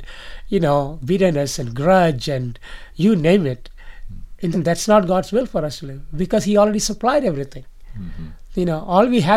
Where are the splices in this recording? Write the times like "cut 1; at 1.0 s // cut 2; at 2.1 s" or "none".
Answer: cut 1; at 4.5 s